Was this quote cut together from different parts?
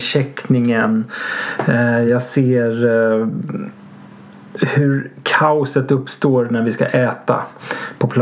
no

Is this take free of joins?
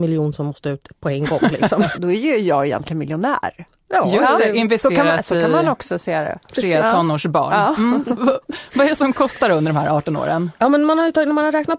no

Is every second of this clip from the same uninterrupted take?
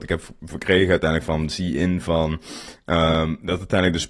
yes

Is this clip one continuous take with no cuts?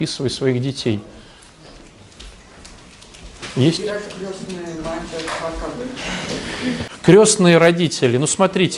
yes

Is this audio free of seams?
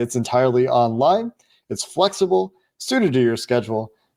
yes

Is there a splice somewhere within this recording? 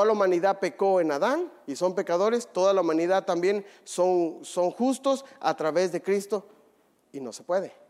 no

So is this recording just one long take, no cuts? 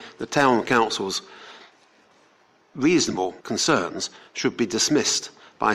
no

